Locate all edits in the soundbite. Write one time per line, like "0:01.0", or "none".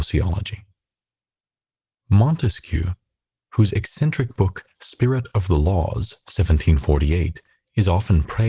none